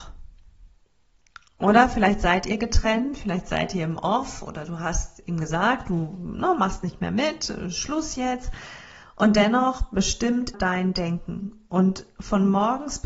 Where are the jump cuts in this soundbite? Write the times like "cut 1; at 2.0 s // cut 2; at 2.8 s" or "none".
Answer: cut 1; at 10.5 s